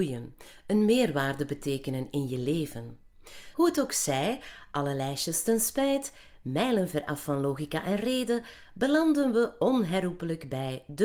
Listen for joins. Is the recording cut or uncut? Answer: cut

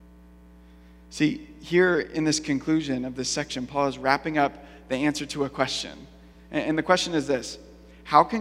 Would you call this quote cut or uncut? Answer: uncut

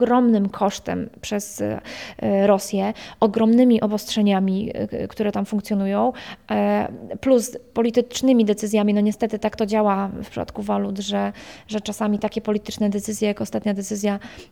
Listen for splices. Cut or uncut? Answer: uncut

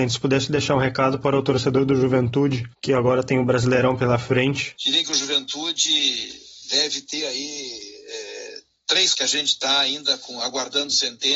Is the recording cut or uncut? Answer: cut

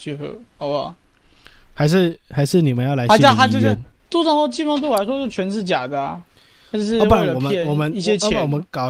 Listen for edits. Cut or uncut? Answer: cut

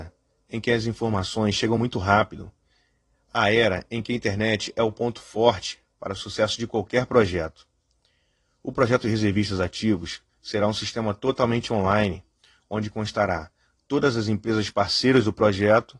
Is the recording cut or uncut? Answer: uncut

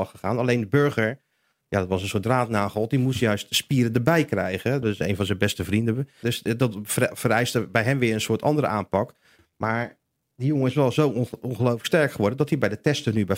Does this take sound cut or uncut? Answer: cut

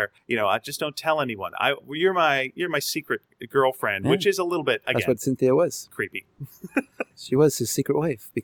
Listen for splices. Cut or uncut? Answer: uncut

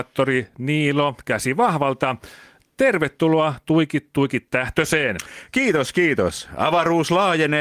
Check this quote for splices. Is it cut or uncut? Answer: uncut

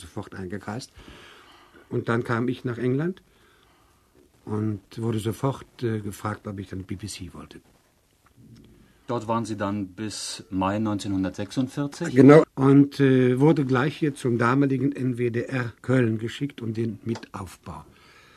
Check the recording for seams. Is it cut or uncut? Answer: cut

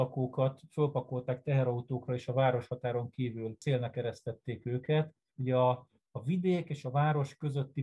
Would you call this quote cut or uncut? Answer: cut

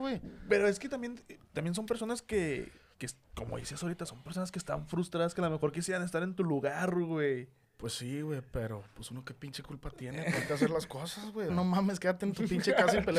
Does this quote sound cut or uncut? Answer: cut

